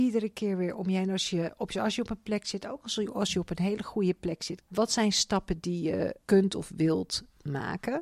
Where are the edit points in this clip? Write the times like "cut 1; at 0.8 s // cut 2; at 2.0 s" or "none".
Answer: cut 1; at 4.7 s // cut 2; at 6.2 s